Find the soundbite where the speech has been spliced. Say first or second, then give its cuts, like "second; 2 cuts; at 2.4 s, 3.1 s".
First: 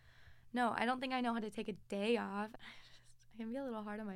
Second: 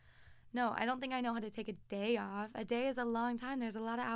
first; 1 cut; at 2.5 s